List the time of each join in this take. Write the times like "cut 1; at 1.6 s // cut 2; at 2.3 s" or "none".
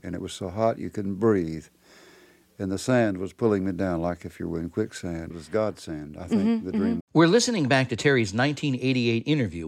cut 1; at 5.3 s // cut 2; at 7.0 s